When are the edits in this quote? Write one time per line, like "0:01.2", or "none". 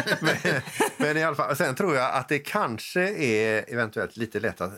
none